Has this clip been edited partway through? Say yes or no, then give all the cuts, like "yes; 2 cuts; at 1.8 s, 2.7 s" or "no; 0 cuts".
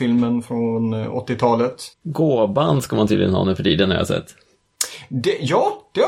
yes; 1 cut; at 1.9 s